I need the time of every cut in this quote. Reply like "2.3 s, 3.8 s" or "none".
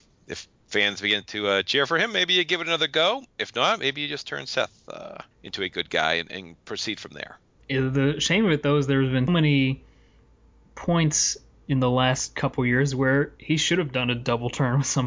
5.3 s, 7.6 s, 9.3 s